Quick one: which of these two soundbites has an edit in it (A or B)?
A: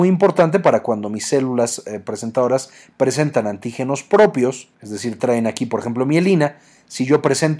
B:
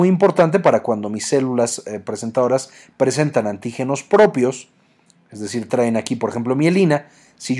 A